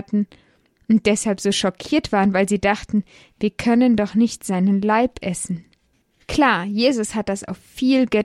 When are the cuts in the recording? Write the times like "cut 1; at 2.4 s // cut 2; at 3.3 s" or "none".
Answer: none